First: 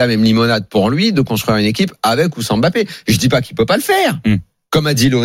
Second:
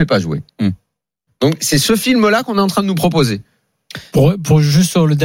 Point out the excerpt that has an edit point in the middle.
second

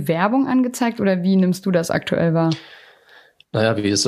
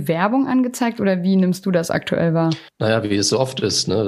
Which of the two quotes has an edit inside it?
second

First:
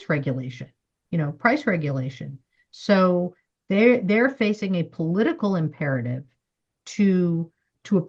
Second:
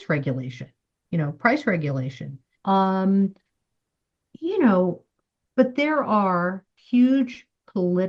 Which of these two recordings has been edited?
second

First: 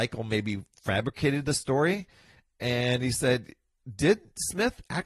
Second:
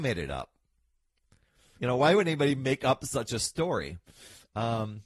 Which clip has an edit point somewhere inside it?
second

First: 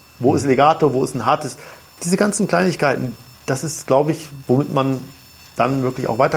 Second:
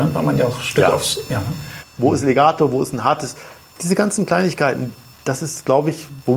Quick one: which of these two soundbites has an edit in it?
second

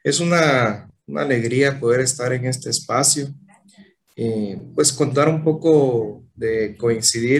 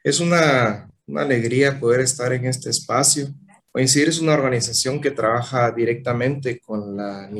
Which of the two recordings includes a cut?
second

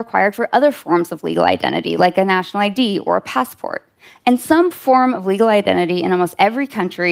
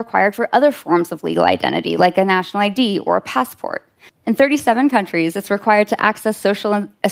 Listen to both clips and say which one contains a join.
second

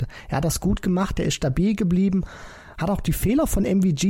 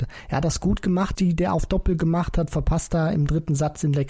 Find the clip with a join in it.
second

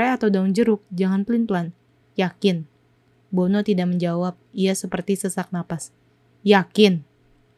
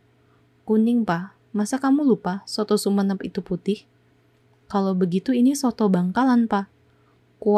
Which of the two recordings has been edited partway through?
first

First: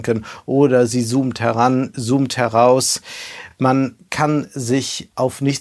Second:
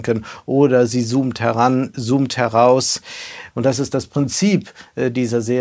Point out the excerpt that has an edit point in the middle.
second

